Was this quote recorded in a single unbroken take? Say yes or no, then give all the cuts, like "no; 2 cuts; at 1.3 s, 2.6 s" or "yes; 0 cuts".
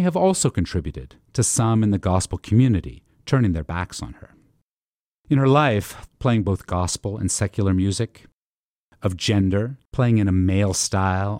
no; 1 cut; at 6.1 s